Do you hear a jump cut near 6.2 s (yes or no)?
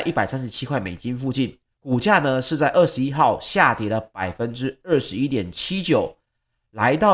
no